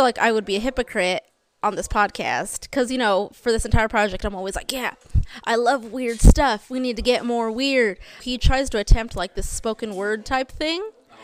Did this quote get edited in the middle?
yes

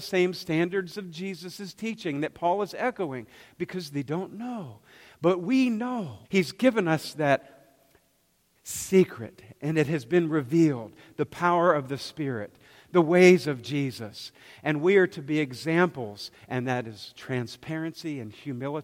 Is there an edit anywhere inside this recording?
yes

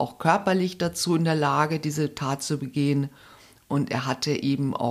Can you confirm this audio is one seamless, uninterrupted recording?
yes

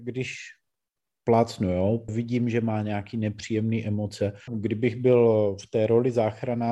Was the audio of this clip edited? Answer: yes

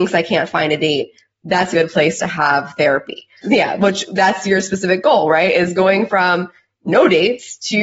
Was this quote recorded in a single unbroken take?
no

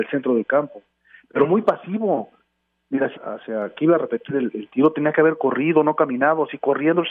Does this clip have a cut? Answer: yes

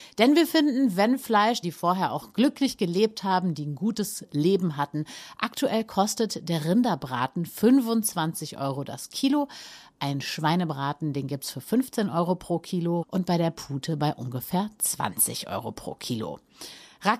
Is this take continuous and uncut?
no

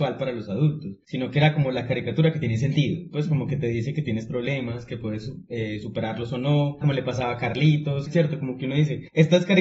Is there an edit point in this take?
yes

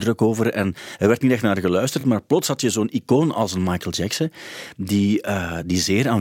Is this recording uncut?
yes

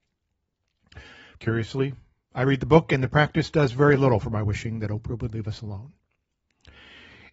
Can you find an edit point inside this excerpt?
yes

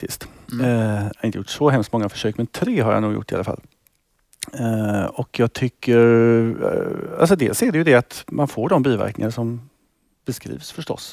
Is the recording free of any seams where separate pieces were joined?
yes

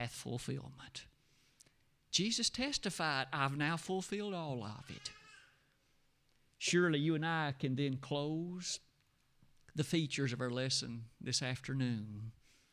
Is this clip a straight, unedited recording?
yes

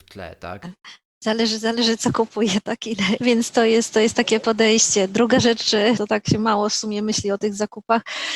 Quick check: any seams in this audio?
yes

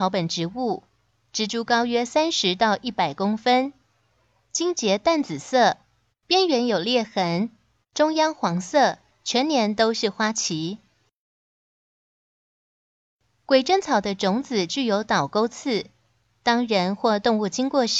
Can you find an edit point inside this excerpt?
yes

